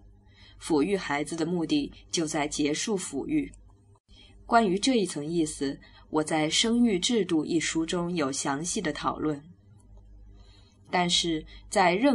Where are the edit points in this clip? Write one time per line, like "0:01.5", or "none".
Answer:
none